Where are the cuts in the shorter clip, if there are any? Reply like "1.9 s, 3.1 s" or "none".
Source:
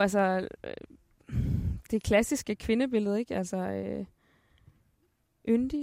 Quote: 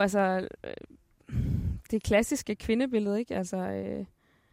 none